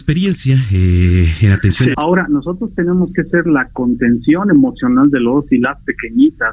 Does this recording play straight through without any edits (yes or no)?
no